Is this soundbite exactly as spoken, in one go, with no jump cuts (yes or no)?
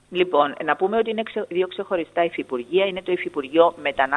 yes